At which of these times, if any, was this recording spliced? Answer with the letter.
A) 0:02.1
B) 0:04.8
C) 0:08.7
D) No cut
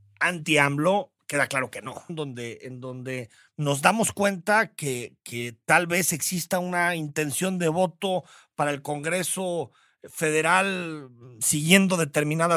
A